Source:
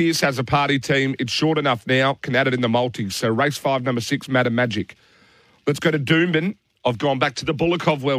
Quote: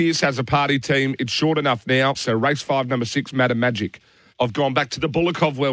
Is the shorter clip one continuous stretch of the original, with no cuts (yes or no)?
no